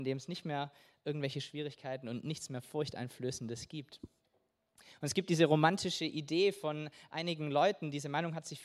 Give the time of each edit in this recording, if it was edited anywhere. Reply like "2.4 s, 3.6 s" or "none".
none